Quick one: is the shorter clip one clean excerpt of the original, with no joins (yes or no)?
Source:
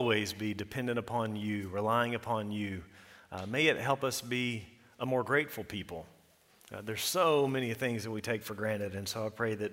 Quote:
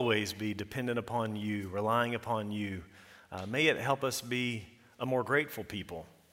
yes